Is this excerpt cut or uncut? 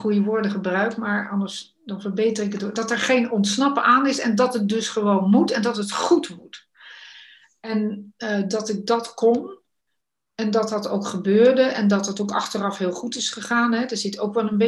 uncut